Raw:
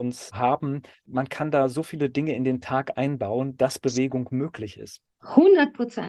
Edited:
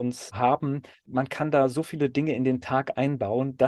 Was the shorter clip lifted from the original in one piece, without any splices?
yes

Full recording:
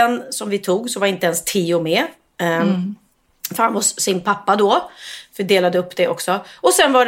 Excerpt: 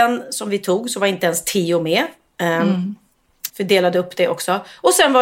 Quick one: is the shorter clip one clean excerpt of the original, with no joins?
no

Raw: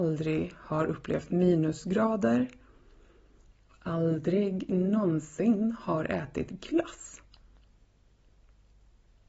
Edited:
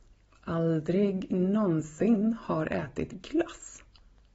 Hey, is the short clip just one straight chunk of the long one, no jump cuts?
yes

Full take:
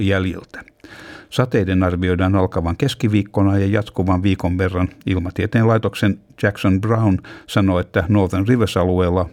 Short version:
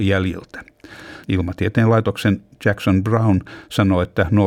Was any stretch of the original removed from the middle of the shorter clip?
yes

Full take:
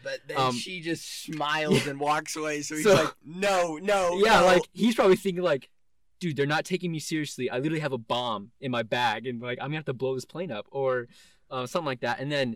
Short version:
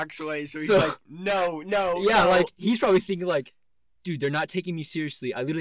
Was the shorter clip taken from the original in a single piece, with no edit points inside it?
yes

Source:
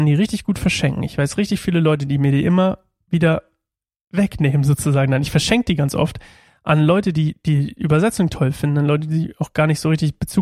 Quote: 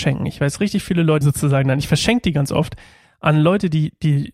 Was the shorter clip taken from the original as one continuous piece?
no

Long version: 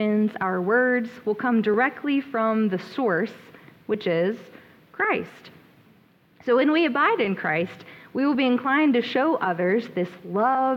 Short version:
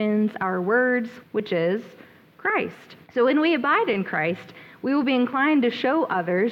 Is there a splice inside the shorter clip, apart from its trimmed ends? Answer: yes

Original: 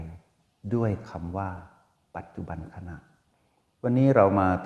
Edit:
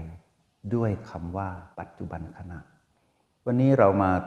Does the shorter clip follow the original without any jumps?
no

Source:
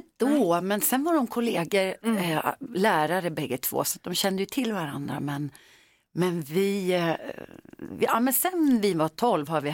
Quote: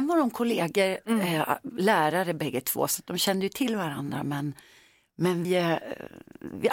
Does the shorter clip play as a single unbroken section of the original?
no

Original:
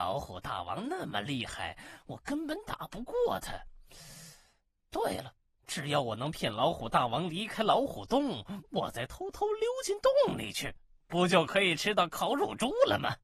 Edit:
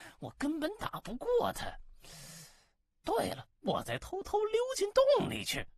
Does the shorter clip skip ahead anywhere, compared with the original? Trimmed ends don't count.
yes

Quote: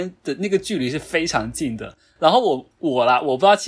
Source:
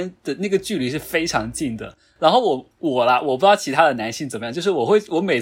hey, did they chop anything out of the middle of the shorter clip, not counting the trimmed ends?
no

